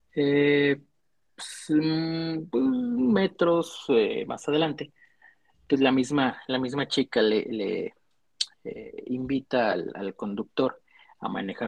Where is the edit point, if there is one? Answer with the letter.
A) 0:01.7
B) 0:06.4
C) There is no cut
C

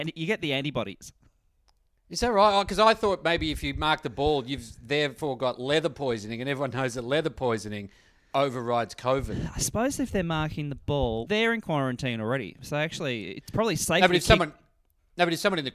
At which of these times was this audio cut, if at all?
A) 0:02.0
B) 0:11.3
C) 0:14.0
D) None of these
B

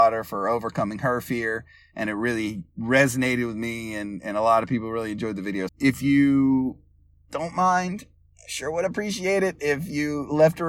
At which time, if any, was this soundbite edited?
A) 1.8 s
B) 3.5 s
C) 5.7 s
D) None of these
C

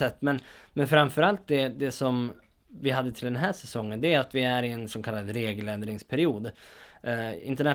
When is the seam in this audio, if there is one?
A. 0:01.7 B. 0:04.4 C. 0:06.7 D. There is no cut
D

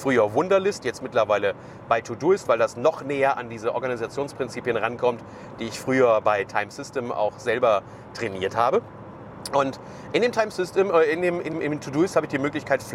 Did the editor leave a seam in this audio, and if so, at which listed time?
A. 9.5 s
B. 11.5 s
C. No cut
B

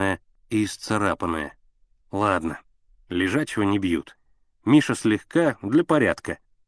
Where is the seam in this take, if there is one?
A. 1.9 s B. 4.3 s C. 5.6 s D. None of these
D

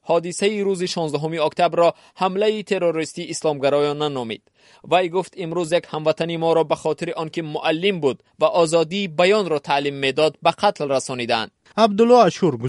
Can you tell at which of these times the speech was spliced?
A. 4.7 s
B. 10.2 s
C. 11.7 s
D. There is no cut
C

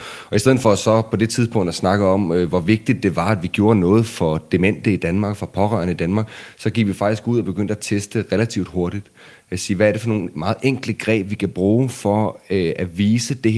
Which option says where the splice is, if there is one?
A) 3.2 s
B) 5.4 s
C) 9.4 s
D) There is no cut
D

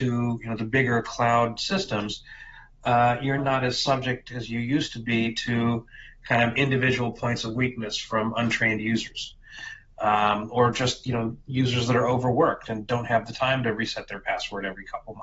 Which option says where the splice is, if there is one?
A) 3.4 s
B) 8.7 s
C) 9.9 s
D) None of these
A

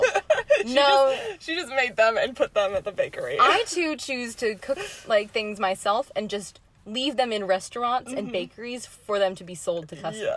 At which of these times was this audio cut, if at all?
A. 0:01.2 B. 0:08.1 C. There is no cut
C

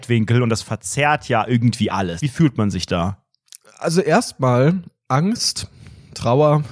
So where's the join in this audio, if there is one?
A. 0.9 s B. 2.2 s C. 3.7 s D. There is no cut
B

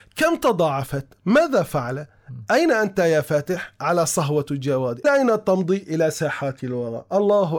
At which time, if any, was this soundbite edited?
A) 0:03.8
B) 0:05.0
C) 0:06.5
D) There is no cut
B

